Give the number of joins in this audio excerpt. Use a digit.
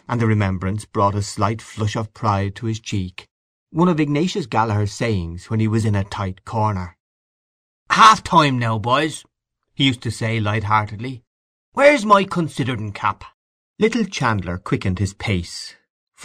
1